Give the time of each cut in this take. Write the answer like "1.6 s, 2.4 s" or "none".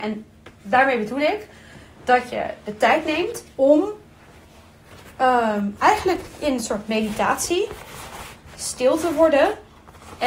3.5 s